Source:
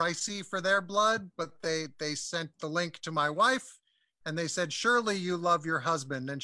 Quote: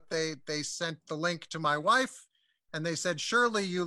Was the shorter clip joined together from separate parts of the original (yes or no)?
no